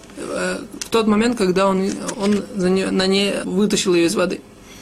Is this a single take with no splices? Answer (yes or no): no